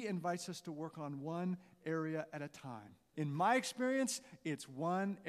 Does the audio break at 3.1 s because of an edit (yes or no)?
yes